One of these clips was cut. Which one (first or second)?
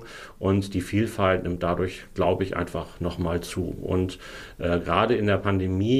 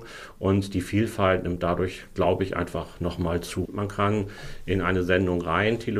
second